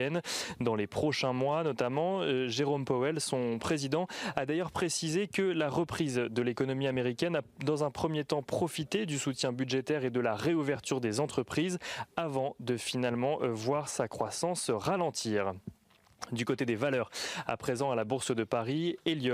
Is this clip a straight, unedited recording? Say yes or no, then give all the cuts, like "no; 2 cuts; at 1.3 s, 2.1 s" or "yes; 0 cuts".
yes; 0 cuts